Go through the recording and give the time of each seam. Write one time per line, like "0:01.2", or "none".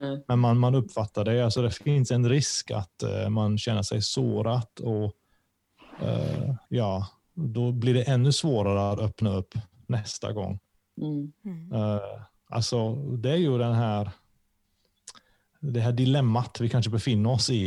0:06.6